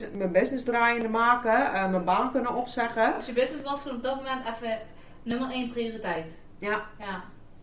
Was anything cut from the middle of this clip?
no; 0 cuts

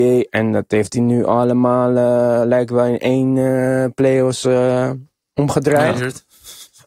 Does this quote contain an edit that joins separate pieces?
no; 0 cuts

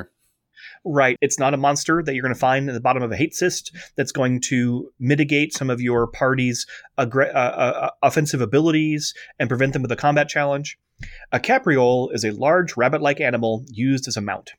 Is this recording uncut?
no; 1 cut; at 1.2 s

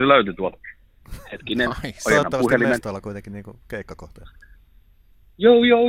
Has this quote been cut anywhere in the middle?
no; 0 cuts

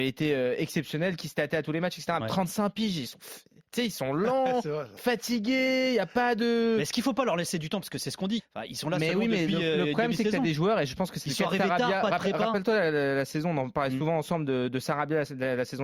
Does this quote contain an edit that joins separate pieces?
yes; 2 cuts; at 2.2 s, 8.4 s

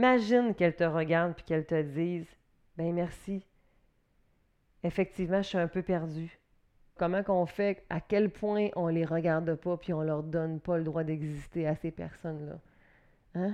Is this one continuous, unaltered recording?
no; 1 cut; at 7.0 s

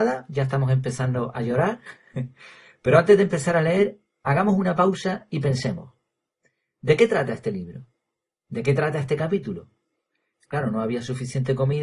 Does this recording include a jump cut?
yes; 1 cut; at 10.3 s

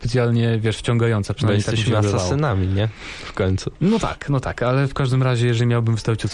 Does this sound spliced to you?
no; 0 cuts

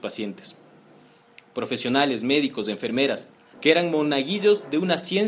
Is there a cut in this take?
yes; 1 cut; at 3.5 s

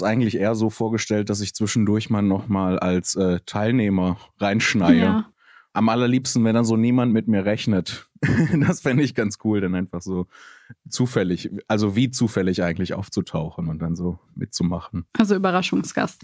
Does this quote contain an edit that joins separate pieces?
no; 0 cuts

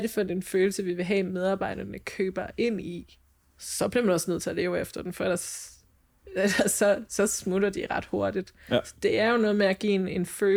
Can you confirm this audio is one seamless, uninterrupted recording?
yes; 0 cuts

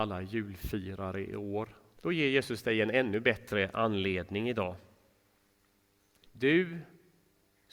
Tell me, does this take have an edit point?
yes; 2 cuts; at 2.0 s, 6.3 s

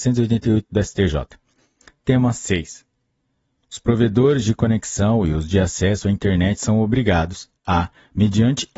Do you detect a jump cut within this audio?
no; 0 cuts

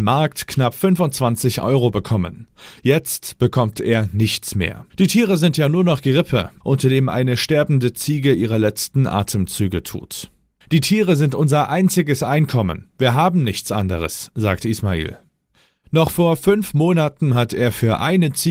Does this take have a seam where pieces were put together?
yes; 3 cuts; at 4.9 s, 6.6 s, 10.6 s

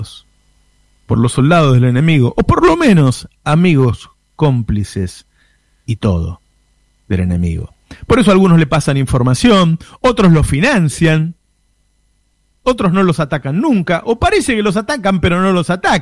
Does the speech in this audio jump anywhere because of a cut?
no; 0 cuts

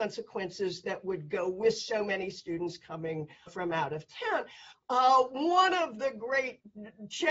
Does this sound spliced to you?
yes; 2 cuts; at 3.5 s, 4.7 s

